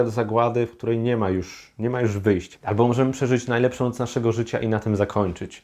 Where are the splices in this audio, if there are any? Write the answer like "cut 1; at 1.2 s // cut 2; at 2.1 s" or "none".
cut 1; at 2.6 s